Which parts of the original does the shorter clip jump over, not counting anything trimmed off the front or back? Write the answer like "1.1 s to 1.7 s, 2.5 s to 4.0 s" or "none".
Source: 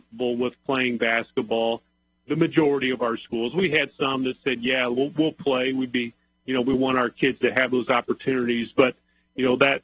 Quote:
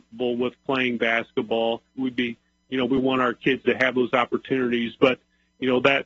2.0 s to 5.7 s

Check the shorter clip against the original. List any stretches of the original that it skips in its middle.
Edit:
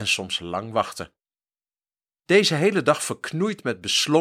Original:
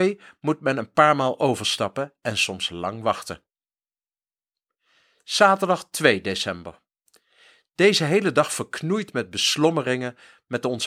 4.5 s to 7.7 s

